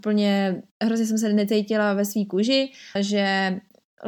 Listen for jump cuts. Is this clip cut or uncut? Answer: cut